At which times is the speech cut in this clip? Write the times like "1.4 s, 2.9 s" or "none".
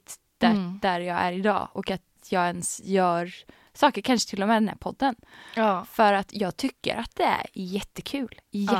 none